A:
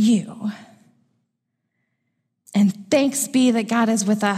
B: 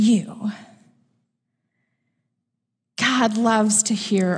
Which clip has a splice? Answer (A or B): A